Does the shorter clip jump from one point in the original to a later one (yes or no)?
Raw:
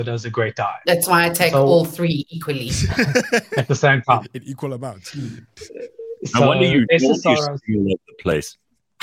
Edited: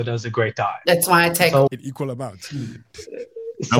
yes